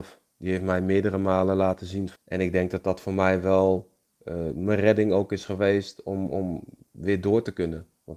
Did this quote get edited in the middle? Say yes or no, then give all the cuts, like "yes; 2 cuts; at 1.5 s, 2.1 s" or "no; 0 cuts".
yes; 1 cut; at 2.2 s